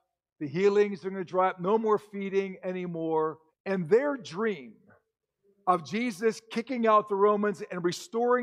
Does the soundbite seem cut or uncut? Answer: cut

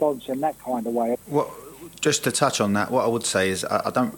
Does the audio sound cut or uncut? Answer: cut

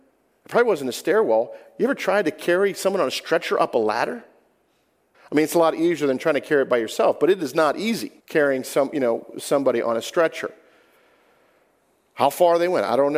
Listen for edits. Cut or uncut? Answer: cut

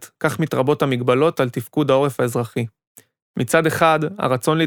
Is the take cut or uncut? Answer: cut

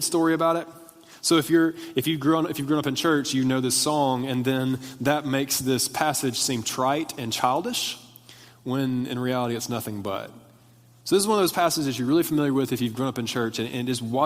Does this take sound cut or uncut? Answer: uncut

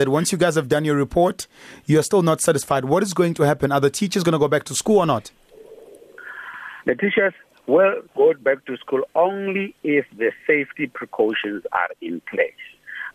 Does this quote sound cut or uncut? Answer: uncut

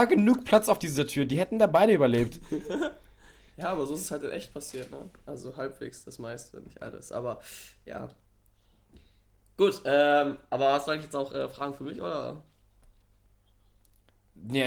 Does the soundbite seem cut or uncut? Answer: uncut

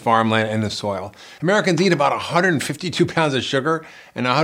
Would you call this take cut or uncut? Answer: cut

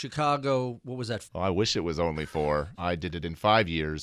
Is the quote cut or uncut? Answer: cut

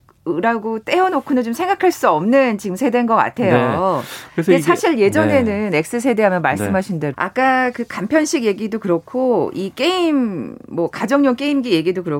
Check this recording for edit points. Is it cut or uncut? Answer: cut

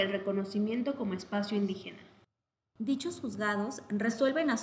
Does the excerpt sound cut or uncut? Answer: uncut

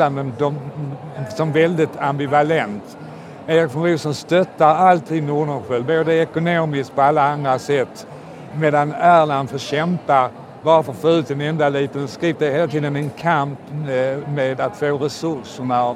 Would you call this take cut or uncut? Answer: cut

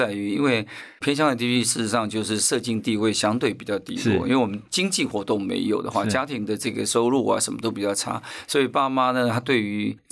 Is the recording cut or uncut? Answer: uncut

